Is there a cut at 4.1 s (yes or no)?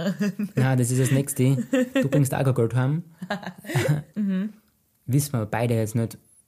yes